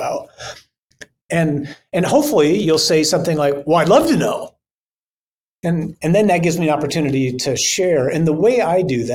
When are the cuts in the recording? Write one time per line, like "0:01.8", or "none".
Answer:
0:01.2